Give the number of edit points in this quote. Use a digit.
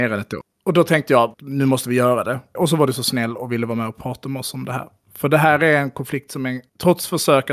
2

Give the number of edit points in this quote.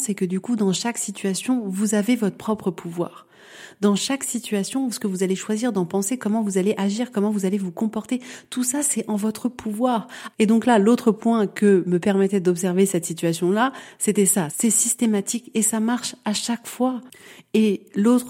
3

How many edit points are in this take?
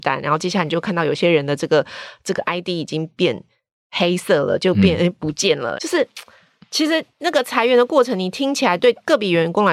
1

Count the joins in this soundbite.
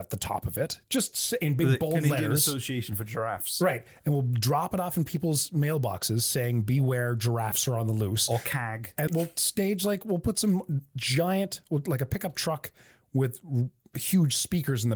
1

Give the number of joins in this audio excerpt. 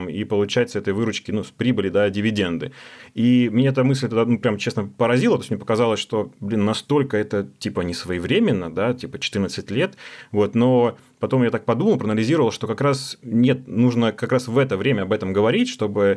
0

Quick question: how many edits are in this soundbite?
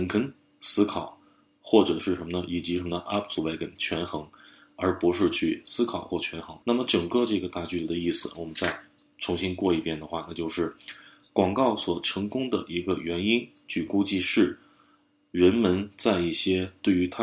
1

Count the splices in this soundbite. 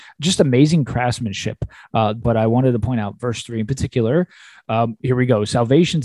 1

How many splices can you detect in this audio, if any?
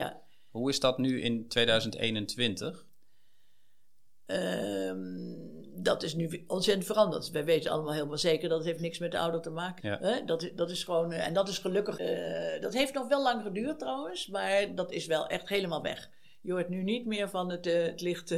2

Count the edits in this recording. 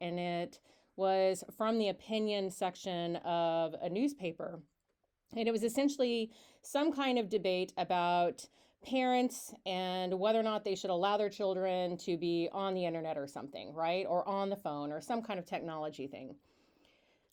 0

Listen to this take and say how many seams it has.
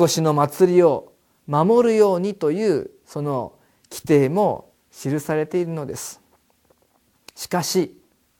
0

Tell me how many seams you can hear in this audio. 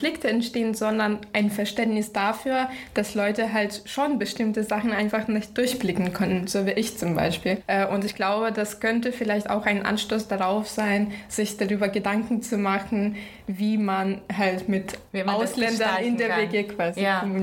0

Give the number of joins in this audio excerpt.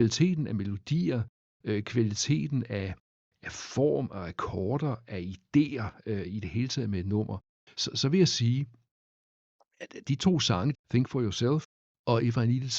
1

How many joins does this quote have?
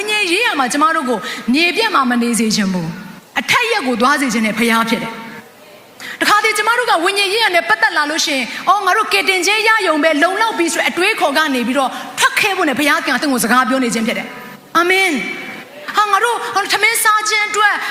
2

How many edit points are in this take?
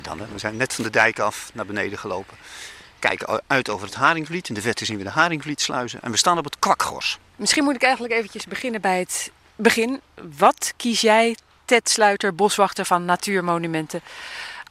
0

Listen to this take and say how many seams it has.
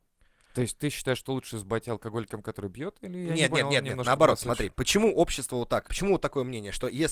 1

